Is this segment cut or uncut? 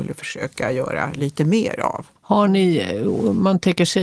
cut